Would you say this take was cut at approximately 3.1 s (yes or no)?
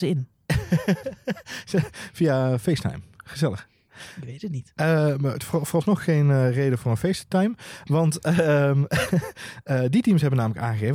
no